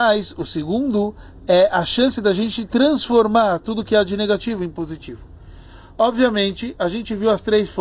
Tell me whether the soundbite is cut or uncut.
uncut